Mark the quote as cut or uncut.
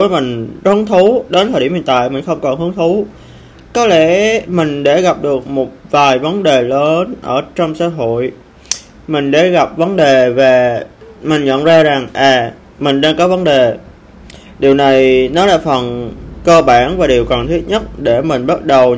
uncut